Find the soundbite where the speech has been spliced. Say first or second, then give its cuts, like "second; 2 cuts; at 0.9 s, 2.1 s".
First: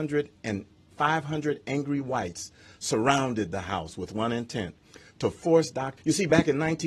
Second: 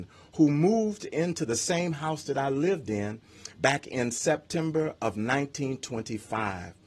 first; 1 cut; at 6.0 s